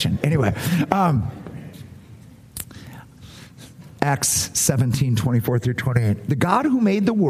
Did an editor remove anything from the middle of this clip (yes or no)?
no